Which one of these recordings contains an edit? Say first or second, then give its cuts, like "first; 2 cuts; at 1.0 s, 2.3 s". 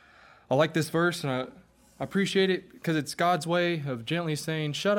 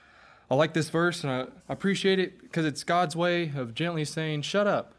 second; 1 cut; at 1.6 s